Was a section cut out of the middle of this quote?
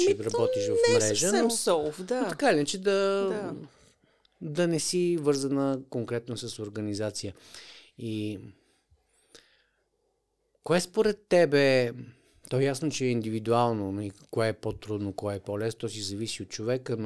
no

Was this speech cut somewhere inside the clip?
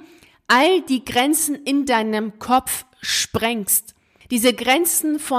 no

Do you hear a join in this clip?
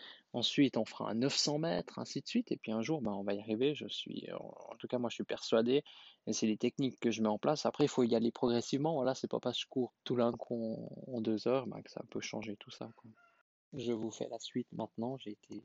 yes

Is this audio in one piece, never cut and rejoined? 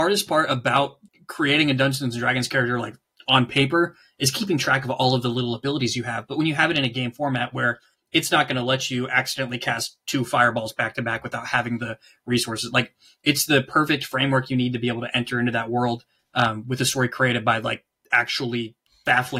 yes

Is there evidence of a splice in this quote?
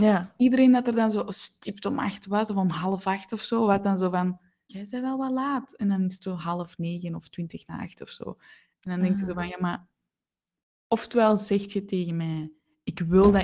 yes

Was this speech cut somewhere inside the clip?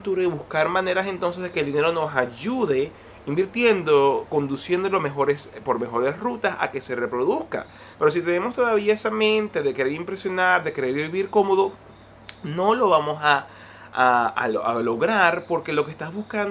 no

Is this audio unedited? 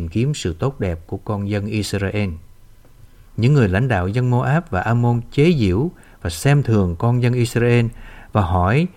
no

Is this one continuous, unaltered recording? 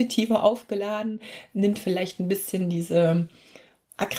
yes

